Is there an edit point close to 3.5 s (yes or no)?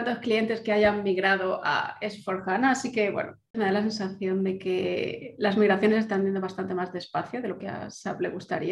yes